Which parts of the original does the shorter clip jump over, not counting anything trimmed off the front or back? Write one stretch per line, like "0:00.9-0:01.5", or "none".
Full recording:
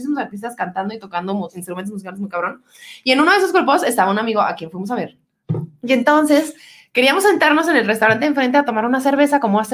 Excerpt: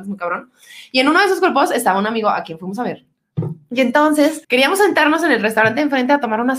0:06.6-0:06.9